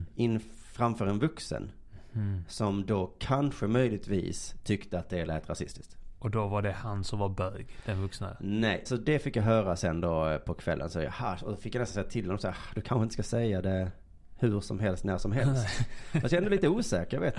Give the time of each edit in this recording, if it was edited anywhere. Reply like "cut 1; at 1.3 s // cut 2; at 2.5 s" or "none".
cut 1; at 8.9 s